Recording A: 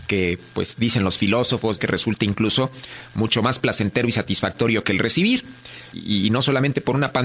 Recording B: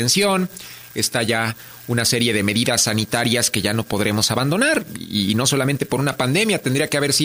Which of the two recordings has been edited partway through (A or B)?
A